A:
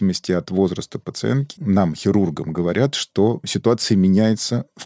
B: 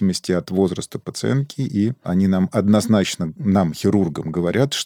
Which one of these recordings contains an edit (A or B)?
A